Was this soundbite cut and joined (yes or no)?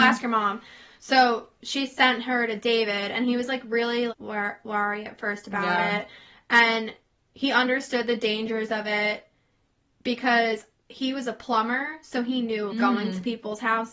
yes